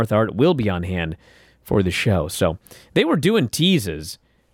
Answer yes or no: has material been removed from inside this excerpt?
no